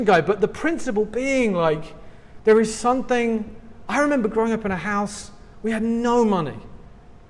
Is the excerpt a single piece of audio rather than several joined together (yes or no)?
yes